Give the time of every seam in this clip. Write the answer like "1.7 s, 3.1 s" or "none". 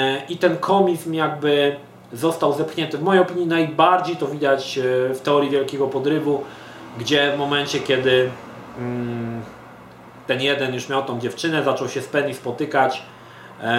none